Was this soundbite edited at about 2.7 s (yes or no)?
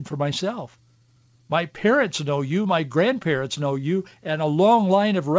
no